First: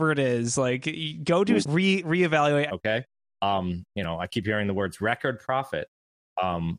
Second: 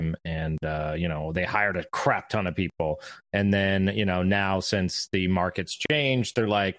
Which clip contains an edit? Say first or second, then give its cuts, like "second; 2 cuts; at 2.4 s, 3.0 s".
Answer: first; 2 cuts; at 1.6 s, 2.7 s